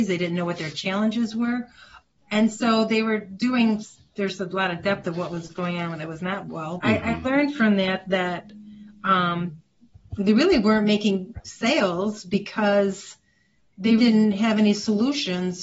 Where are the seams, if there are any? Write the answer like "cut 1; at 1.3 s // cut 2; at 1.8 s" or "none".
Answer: cut 1; at 4.1 s // cut 2; at 6.8 s // cut 3; at 14.0 s